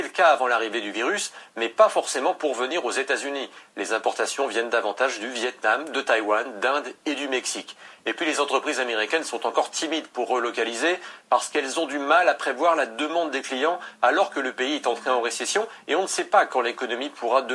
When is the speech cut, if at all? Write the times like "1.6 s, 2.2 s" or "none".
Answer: none